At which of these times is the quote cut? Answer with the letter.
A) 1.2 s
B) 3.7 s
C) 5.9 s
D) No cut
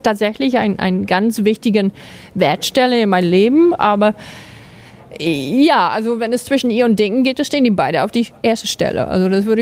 D